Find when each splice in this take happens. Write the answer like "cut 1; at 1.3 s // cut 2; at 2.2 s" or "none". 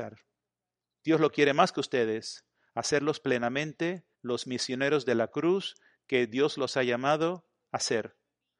cut 1; at 0.9 s // cut 2; at 4.1 s